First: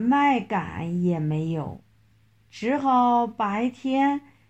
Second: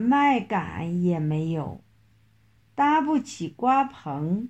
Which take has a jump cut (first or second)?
first